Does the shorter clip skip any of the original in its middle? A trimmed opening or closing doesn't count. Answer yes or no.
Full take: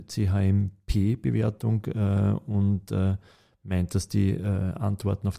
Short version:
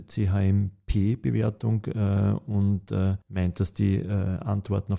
yes